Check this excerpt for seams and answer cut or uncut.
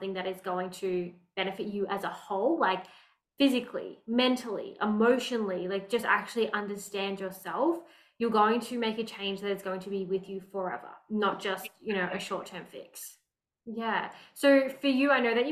cut